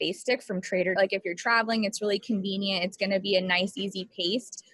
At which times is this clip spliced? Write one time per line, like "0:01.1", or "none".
0:01.0